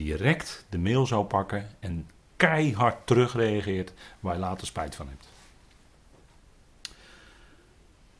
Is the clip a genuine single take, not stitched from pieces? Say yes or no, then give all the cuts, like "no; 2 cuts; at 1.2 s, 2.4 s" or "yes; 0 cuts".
yes; 0 cuts